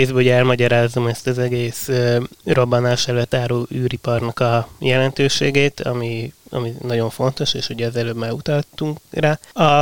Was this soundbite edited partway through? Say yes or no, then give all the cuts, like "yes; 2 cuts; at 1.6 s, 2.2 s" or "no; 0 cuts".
no; 0 cuts